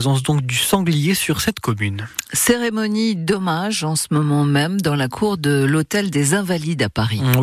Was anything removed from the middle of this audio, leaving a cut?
no; 0 cuts

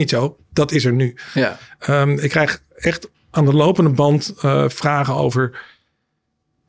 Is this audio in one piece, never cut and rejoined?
yes; 0 cuts

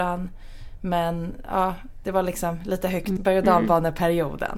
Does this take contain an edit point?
yes; 1 cut; at 3.2 s

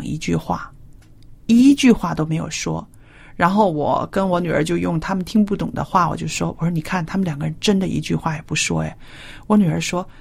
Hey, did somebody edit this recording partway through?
no; 0 cuts

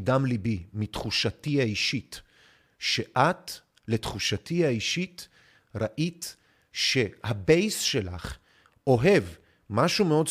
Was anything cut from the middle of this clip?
no; 0 cuts

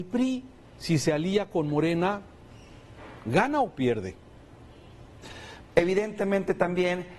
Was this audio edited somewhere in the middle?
yes; 1 cut; at 5.6 s

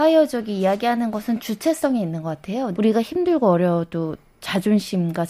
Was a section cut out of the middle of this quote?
yes; 1 cut; at 2.7 s

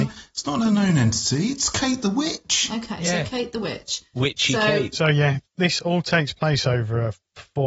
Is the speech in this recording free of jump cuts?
yes; 0 cuts

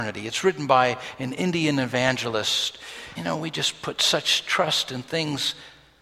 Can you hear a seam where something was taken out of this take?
yes; 1 cut; at 3.1 s

